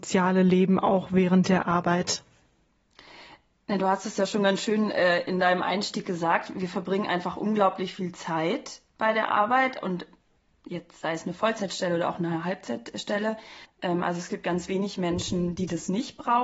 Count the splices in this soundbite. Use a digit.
1